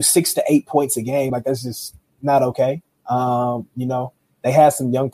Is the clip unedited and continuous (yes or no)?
yes